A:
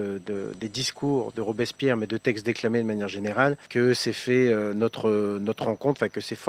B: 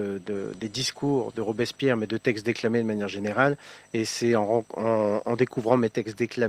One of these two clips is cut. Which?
A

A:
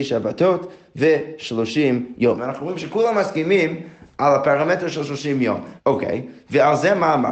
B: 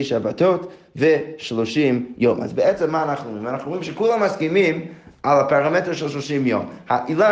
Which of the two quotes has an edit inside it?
A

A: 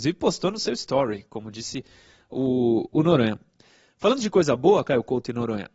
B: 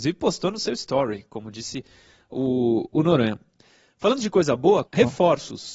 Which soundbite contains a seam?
B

